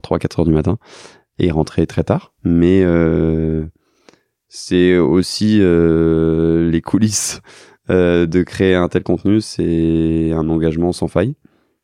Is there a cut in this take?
no; 0 cuts

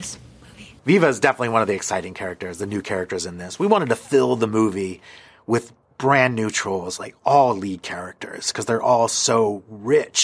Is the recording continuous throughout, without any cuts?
yes; 0 cuts

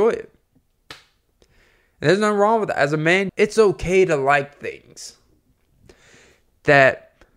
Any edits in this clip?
yes; 1 cut; at 3.3 s

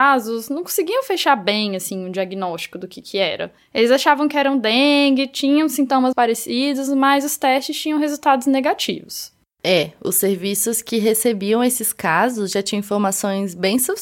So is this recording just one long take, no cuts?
no; 1 cut; at 6.1 s

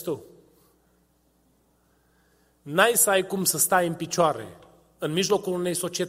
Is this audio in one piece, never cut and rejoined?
yes; 0 cuts

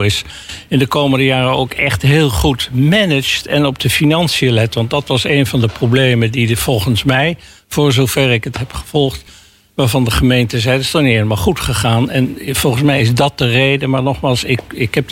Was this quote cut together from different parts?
no; 0 cuts

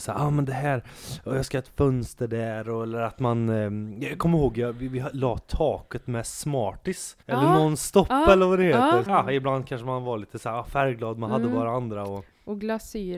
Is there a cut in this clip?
yes; 2 cuts; at 7.2 s, 9.1 s

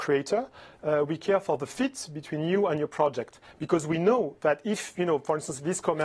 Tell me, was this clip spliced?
no; 0 cuts

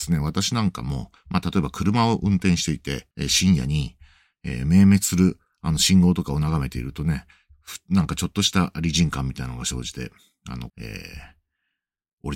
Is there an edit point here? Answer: yes; 2 cuts; at 3.1 s, 10.7 s

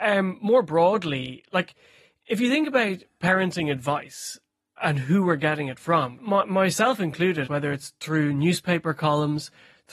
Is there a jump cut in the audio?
yes; 2 cuts; at 6.2 s, 7.5 s

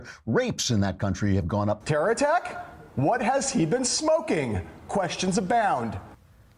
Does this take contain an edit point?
yes; 1 cut; at 1.8 s

